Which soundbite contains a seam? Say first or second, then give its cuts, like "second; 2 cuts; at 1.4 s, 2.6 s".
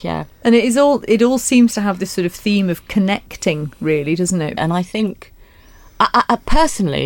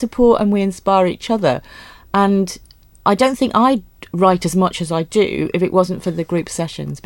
first; 1 cut; at 4.6 s